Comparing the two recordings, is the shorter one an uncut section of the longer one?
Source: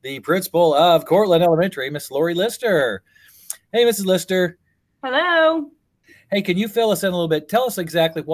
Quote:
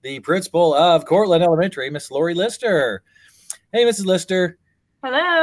yes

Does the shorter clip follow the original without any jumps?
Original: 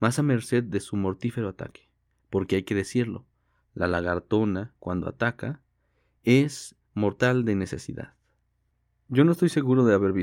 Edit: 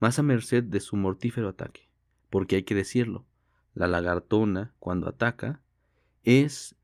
yes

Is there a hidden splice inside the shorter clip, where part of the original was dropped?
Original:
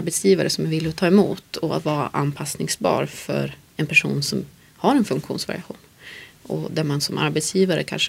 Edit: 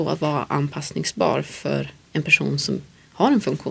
no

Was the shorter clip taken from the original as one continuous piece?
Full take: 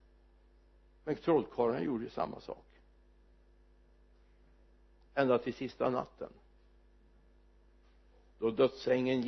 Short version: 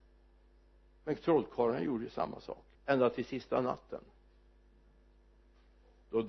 no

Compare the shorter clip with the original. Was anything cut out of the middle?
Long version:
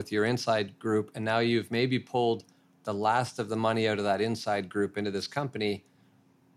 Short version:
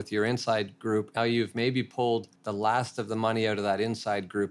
yes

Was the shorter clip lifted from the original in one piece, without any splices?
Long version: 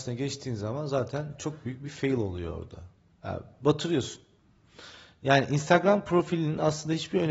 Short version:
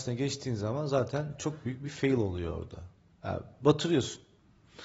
yes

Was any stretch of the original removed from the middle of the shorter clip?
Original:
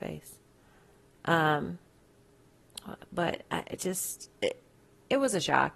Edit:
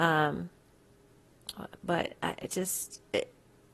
no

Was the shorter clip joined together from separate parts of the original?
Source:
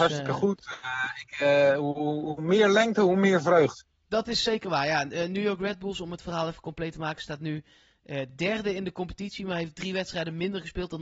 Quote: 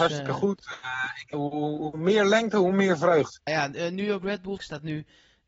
yes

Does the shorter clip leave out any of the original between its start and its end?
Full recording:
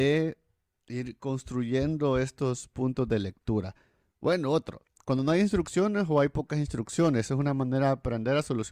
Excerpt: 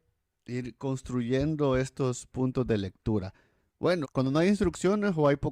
yes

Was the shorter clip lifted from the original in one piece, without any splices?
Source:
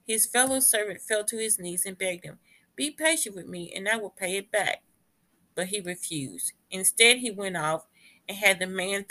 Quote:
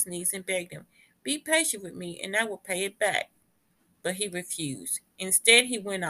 yes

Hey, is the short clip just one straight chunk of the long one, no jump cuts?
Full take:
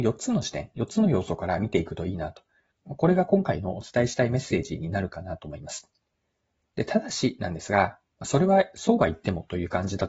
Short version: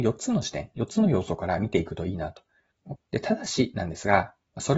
no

